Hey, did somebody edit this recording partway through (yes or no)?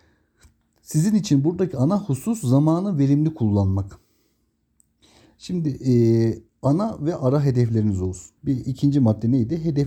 yes